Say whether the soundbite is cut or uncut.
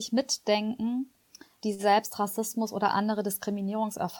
cut